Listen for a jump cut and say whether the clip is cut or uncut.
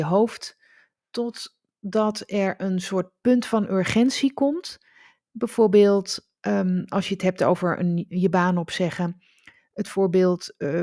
uncut